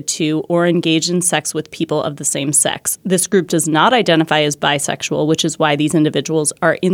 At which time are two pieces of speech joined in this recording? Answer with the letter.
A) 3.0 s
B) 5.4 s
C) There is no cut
C